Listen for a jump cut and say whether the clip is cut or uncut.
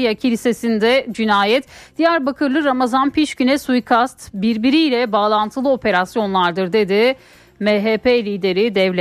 uncut